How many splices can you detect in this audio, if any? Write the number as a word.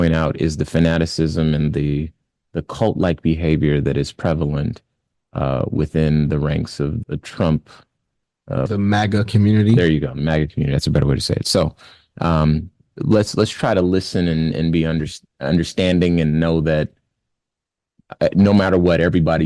two